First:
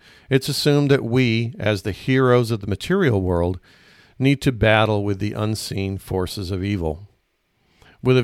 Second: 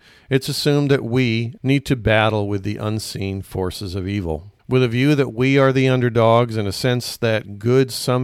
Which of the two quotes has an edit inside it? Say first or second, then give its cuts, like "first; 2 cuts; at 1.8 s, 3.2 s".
second; 2 cuts; at 1.6 s, 4.6 s